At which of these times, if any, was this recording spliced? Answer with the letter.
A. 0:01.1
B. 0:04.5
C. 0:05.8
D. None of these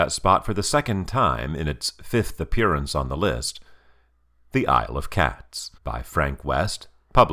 C